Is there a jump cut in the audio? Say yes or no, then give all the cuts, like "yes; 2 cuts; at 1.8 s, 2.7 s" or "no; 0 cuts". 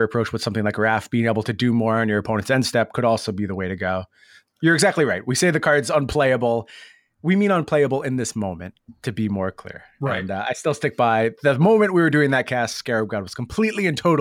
no; 0 cuts